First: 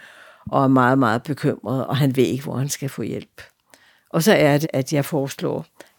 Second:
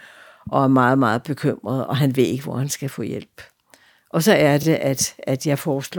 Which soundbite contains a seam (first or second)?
first